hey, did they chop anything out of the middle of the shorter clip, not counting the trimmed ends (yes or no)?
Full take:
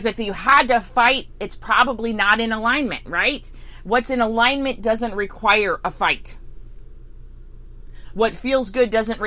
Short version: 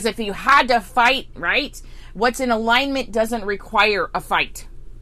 yes